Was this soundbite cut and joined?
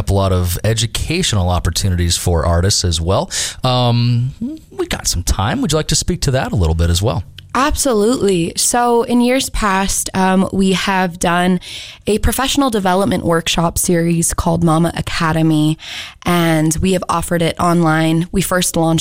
no; 0 cuts

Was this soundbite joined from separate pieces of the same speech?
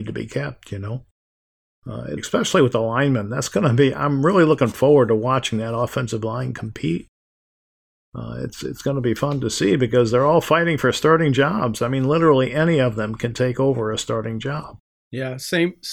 yes; 1 cut; at 2.2 s

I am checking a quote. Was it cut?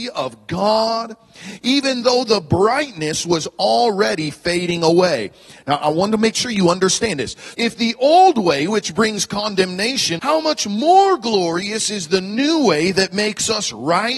yes; 2 cuts; at 7.5 s, 10.2 s

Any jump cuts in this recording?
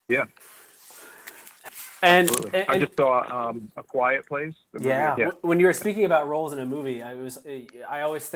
yes; 2 cuts; at 1.7 s, 5.2 s

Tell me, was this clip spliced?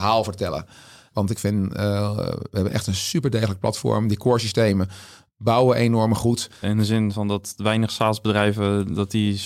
yes; 2 cuts; at 1.1 s, 6.6 s

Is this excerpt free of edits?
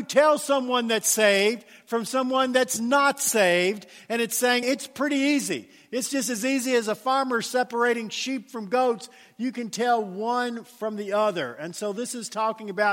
no; 1 cut; at 4.6 s

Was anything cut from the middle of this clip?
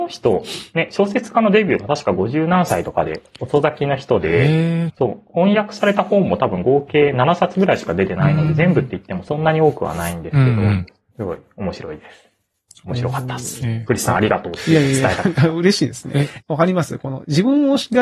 yes; 3 cuts; at 4.9 s, 11.1 s, 16.4 s

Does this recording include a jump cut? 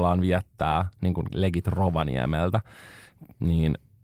no; 0 cuts

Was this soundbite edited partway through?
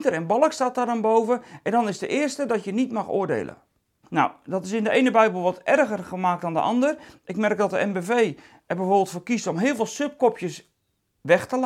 yes; 1 cut; at 4.0 s

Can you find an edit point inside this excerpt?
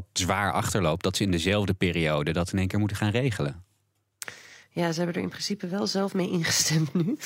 no; 0 cuts

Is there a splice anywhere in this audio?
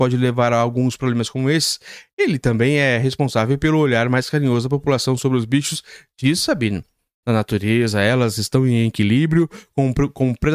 yes; 1 cut; at 7.2 s

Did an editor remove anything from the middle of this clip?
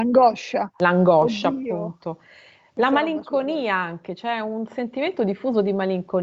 no; 0 cuts

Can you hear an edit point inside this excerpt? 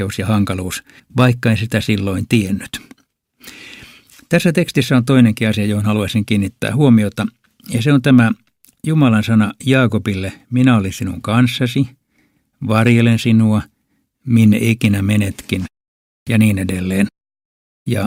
yes; 1 cut; at 1.0 s

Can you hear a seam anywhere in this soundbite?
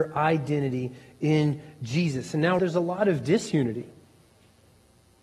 yes; 1 cut; at 2.6 s

